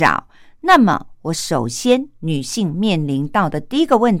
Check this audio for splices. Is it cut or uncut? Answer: uncut